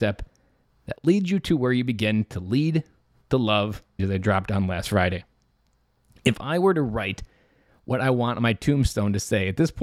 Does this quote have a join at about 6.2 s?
no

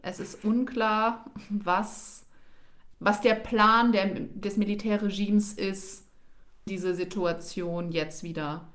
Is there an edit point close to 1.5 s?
no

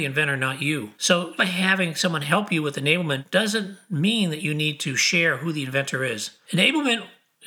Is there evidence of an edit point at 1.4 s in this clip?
yes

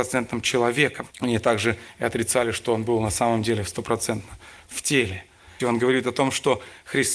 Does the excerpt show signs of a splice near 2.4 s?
no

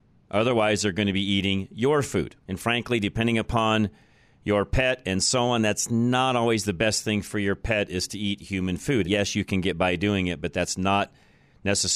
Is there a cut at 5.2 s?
no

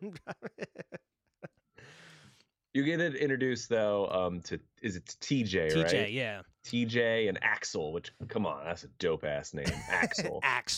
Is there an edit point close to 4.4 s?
no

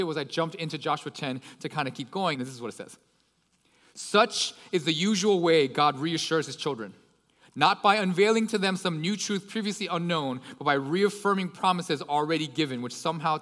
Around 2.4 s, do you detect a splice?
yes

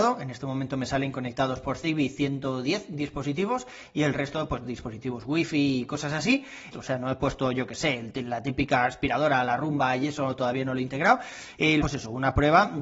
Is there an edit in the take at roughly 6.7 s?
yes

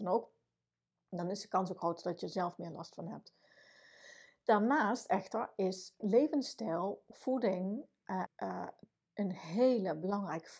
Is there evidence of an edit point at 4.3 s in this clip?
no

